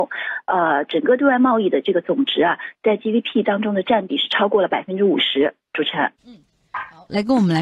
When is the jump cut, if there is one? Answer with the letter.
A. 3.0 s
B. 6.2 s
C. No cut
B